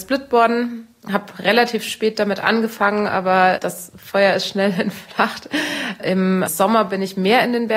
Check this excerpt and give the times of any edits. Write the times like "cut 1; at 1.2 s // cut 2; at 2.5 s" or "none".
cut 1; at 6.5 s

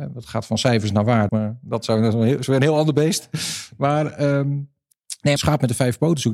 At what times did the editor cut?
cut 1; at 1.3 s // cut 2; at 5.4 s

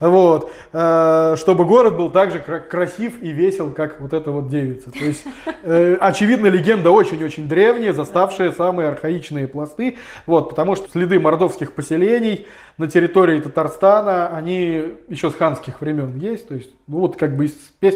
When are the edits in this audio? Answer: cut 1; at 10.9 s

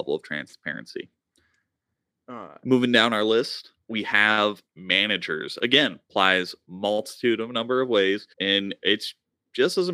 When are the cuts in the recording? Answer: cut 1; at 3.8 s // cut 2; at 6.0 s // cut 3; at 8.3 s

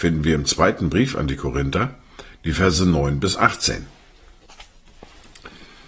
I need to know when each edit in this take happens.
cut 1; at 2.3 s

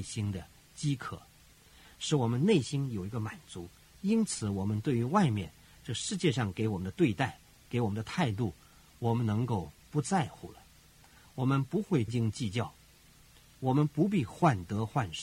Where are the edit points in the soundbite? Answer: cut 1; at 12.1 s

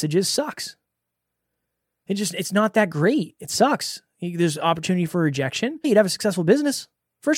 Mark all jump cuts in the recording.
cut 1; at 5.8 s

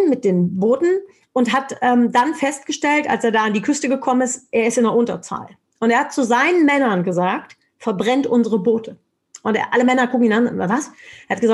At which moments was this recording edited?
none

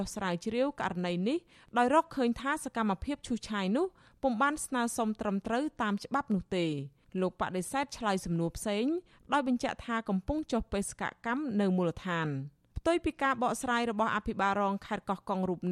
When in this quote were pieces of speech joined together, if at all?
none

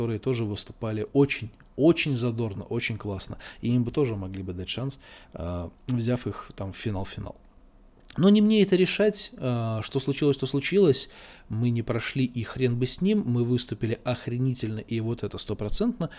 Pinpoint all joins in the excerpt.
cut 1; at 5.8 s

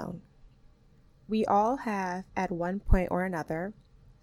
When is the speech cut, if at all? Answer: none

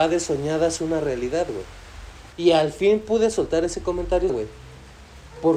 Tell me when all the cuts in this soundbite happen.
cut 1; at 2.3 s // cut 2; at 4.3 s

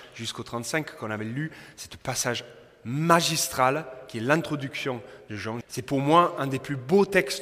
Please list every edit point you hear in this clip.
cut 1; at 5.6 s

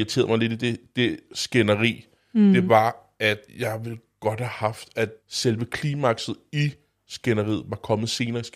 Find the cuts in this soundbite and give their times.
cut 1; at 3.5 s // cut 2; at 5.2 s

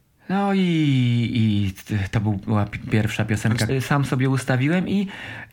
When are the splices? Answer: cut 1; at 3.7 s

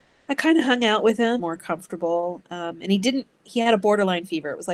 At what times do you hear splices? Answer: cut 1; at 1.4 s

